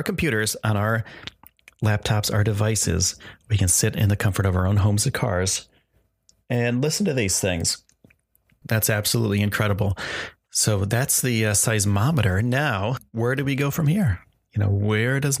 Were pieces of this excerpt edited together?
yes; 1 cut; at 8.6 s

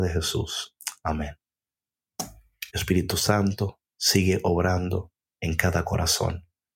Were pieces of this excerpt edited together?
yes; 1 cut; at 2.7 s

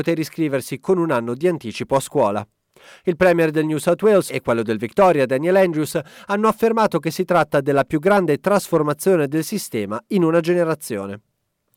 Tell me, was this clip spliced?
yes; 1 cut; at 4.3 s

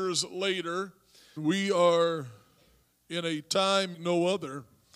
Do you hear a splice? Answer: yes; 2 cuts; at 1.4 s, 3.9 s

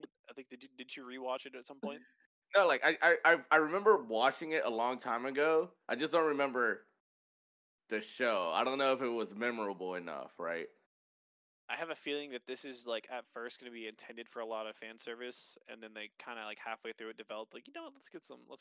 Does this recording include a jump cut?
no; 0 cuts

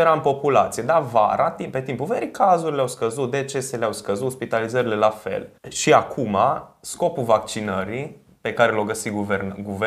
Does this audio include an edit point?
yes; 1 cut; at 5.6 s

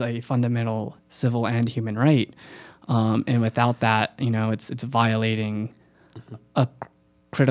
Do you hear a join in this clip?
no; 0 cuts

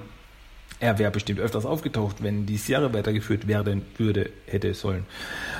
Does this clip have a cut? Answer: no; 0 cuts

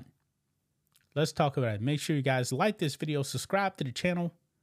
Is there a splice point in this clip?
no; 0 cuts

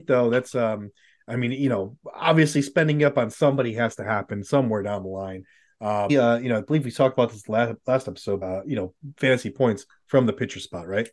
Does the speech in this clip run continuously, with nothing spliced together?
no; 2 cuts; at 6.1 s, 8.4 s

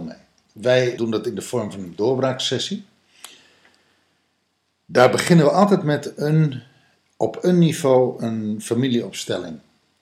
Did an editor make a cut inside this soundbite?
yes; 1 cut; at 1.0 s

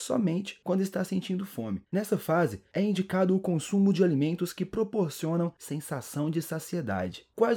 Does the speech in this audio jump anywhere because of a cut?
no; 0 cuts

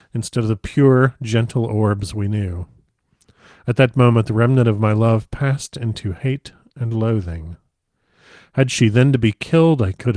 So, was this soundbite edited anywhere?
no; 0 cuts

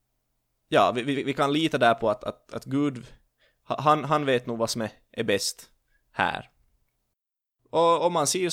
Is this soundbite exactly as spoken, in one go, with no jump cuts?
yes; 0 cuts

